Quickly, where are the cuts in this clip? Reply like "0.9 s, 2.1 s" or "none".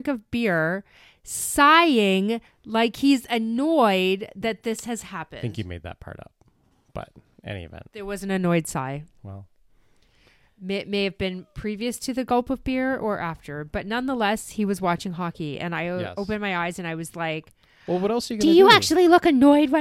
none

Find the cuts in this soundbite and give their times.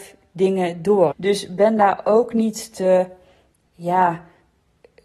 1.1 s

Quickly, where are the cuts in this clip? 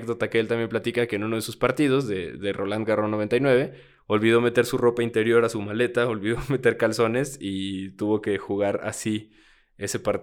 none

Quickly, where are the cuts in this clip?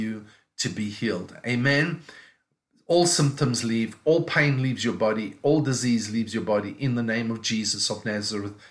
none

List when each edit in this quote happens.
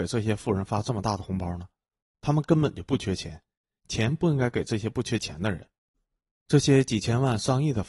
none

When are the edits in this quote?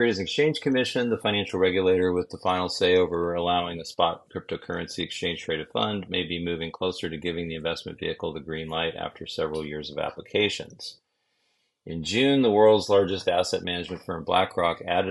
none

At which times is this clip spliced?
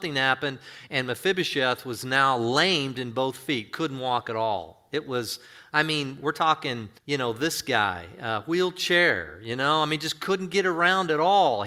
7.0 s

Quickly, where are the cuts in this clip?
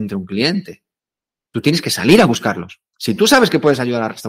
2.9 s

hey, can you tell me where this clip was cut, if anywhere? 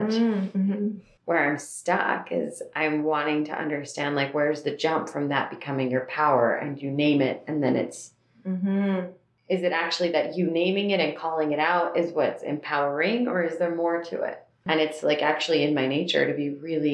14.7 s

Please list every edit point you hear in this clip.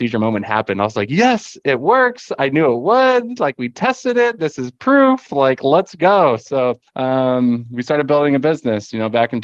6.9 s

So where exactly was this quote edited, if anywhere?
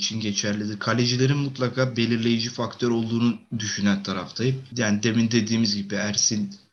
4.7 s

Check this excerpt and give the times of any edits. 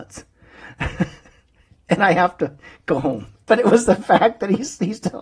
3.4 s

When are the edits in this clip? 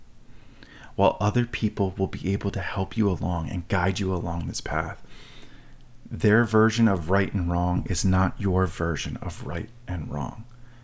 none

